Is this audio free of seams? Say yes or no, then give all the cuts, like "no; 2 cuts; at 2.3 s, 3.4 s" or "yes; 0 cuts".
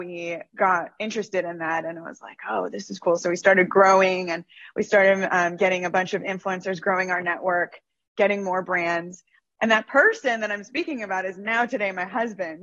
yes; 0 cuts